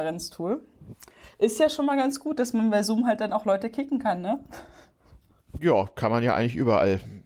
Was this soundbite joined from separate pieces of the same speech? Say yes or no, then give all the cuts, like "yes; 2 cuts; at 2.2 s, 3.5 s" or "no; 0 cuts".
no; 0 cuts